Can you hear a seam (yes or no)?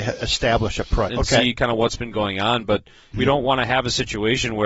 yes